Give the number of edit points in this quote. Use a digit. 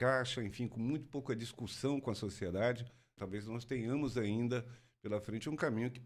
1